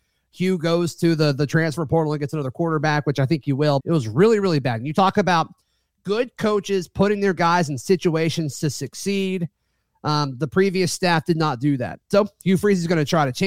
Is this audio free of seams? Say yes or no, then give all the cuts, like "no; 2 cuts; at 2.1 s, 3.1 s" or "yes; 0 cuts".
no; 1 cut; at 3.8 s